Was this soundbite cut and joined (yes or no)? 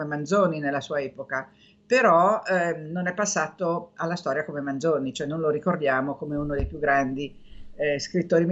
no